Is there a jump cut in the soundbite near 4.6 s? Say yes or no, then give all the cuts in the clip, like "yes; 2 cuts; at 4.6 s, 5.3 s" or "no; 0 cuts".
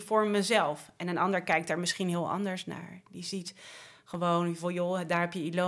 no; 0 cuts